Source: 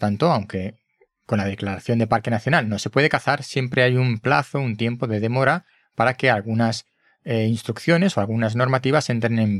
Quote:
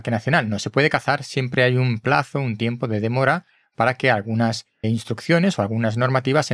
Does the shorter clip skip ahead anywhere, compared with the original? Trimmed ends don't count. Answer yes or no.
yes